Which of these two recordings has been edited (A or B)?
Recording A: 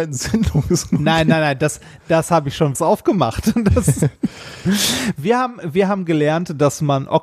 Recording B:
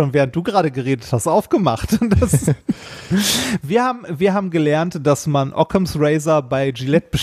A